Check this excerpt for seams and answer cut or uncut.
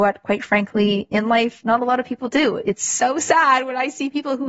uncut